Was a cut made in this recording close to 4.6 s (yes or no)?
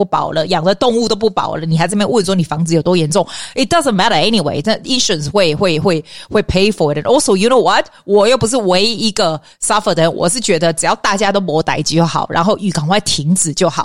no